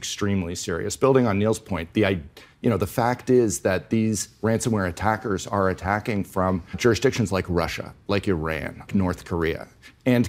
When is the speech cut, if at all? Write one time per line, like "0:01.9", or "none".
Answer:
0:06.7
0:08.9